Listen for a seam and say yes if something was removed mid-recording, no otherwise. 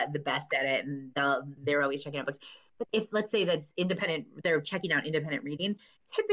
yes